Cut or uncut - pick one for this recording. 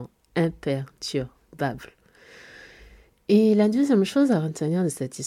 uncut